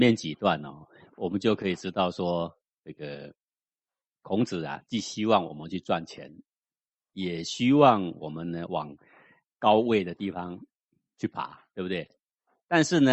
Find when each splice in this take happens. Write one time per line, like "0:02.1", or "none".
none